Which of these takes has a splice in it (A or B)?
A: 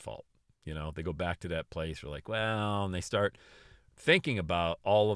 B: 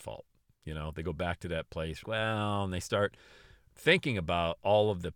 B